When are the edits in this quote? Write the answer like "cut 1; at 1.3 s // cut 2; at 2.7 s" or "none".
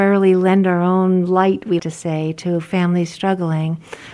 cut 1; at 1.8 s